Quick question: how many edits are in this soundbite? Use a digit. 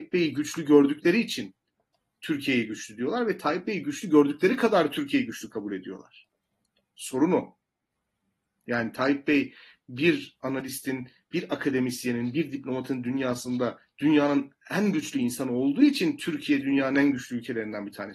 0